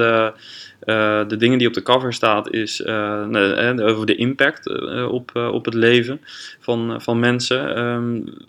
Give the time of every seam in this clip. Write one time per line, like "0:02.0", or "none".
none